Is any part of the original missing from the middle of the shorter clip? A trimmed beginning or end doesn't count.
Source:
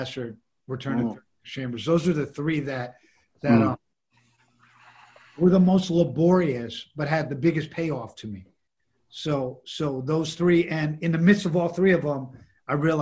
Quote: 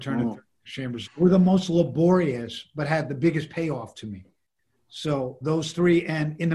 yes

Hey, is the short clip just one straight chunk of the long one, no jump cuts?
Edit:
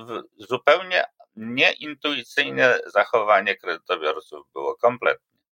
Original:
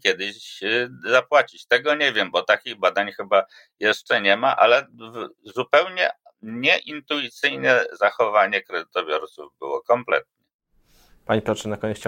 yes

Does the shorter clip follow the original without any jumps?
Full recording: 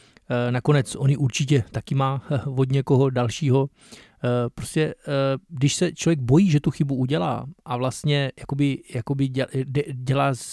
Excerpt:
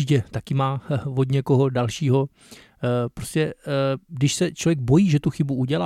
yes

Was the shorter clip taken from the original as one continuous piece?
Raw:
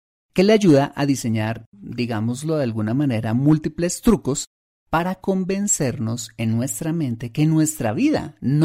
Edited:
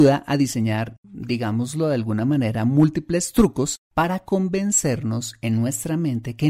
no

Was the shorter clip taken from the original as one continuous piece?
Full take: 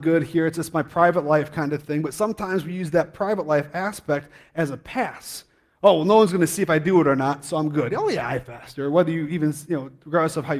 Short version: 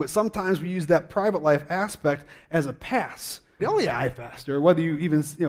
no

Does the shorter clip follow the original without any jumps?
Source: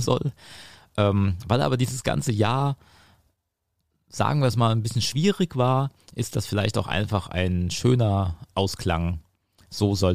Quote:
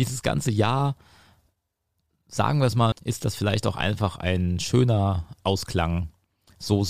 no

